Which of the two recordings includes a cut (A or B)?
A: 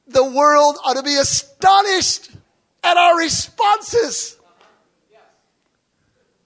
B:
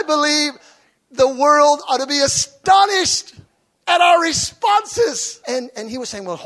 B